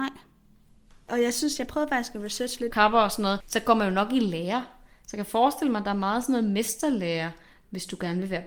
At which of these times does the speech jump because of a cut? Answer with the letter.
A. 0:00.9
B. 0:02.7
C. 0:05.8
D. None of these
B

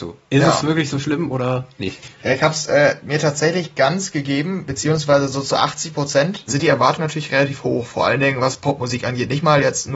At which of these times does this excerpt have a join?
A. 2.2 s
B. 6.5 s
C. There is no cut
B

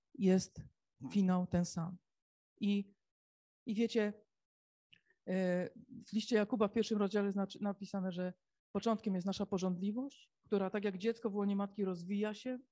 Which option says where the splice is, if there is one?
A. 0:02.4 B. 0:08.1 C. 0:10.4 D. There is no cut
A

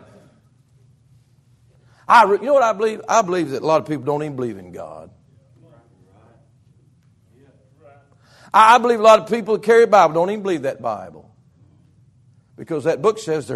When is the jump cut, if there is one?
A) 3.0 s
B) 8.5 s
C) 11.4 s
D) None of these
D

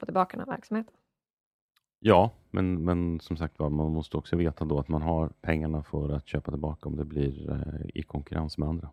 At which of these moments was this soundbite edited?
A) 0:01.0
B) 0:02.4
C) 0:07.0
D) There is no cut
D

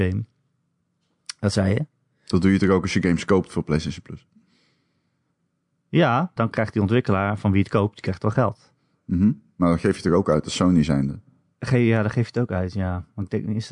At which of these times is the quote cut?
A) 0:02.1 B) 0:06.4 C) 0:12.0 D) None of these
B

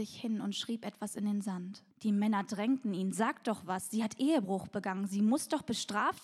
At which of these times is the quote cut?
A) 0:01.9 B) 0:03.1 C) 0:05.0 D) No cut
A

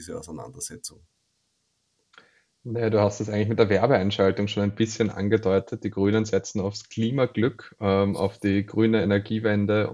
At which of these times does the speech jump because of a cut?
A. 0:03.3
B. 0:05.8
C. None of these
C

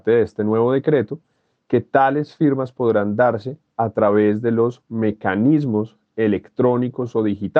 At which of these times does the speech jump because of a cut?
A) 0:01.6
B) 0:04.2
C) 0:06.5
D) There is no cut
D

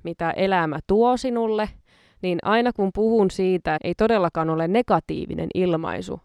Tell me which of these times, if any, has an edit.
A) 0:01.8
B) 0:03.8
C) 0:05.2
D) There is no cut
B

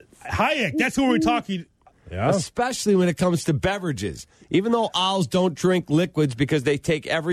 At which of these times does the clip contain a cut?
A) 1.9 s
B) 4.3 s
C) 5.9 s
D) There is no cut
A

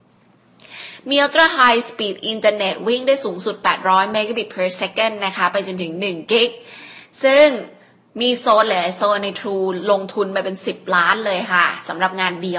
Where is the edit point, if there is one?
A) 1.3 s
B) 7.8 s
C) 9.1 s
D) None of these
D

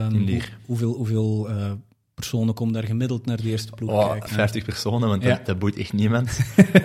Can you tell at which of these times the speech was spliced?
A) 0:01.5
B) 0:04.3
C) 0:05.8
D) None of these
B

